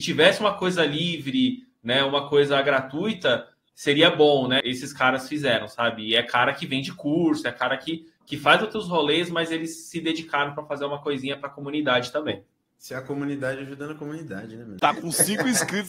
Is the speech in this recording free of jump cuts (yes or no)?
no